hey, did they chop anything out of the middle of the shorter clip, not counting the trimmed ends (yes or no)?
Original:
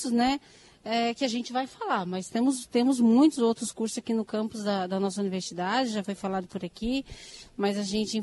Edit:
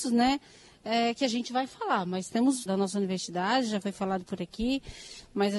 yes